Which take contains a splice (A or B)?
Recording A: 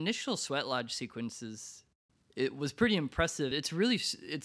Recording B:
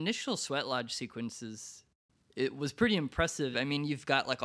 B